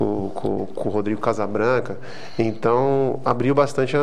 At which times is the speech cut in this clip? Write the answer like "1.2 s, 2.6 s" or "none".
none